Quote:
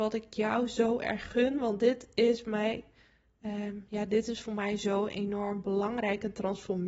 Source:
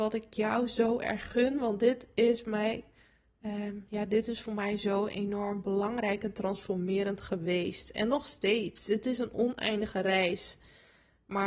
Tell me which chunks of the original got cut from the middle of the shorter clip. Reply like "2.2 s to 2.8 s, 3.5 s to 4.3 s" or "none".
none